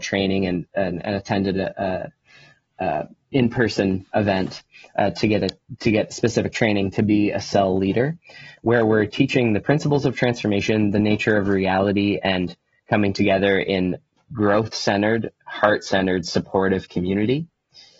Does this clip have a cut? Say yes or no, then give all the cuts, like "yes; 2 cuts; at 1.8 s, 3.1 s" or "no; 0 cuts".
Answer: no; 0 cuts